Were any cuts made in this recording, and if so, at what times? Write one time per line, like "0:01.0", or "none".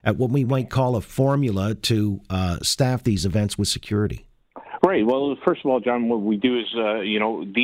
none